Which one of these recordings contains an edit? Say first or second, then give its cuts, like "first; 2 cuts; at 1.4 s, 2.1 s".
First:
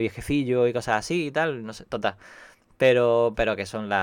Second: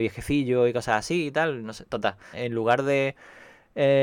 second; 1 cut; at 2.3 s